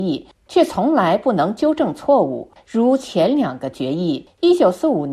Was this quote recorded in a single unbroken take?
no; 1 cut; at 2.6 s

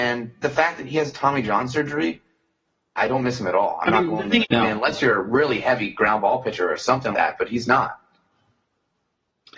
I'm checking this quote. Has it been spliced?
yes; 3 cuts; at 3.0 s, 4.4 s, 7.1 s

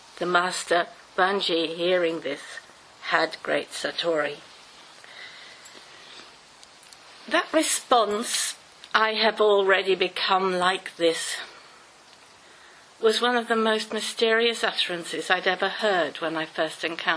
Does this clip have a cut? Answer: no; 0 cuts

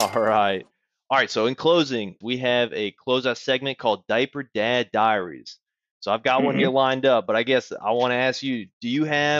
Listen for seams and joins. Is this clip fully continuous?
no; 1 cut; at 2.2 s

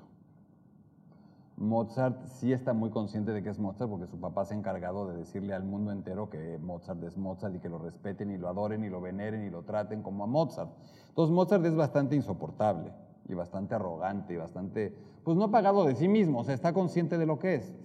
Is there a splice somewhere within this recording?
no; 0 cuts

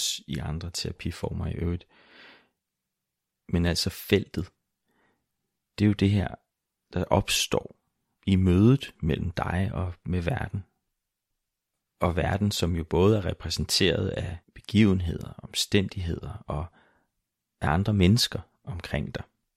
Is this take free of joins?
no; 1 cut; at 14.4 s

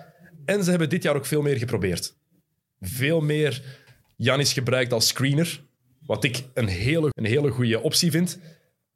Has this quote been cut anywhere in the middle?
yes; 1 cut; at 7.1 s

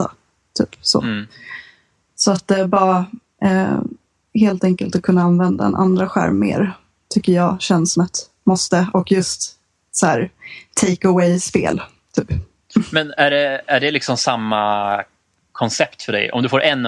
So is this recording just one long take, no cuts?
yes; 0 cuts

